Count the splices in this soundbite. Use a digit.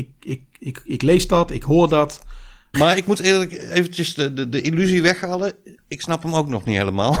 1